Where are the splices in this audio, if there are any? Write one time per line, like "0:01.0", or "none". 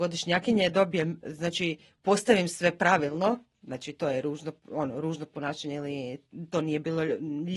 0:03.5